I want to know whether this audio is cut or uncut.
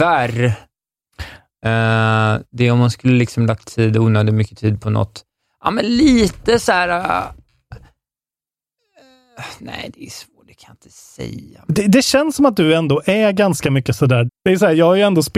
cut